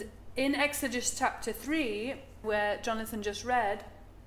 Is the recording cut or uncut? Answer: cut